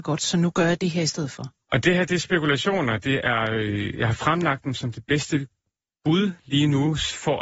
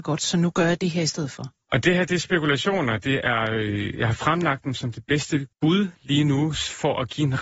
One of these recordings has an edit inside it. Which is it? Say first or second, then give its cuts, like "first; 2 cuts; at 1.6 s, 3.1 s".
second; 1 cut; at 5.5 s